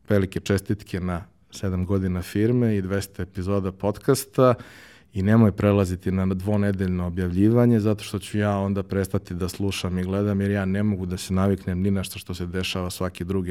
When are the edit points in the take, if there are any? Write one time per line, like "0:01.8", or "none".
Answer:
none

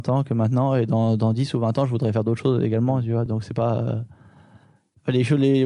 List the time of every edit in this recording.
none

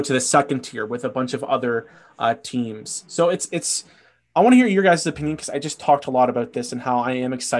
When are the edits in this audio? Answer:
none

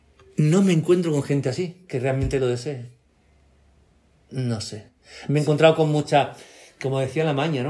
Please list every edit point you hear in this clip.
none

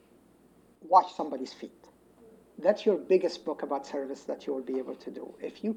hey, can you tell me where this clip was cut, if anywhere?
none

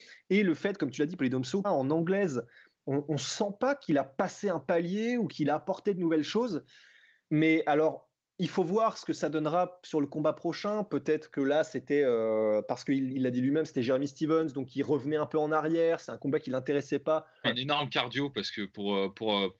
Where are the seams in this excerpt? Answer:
0:01.6
0:07.2
0:17.4

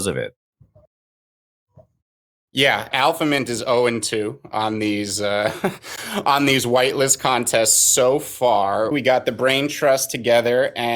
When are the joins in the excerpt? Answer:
0:02.9
0:08.9

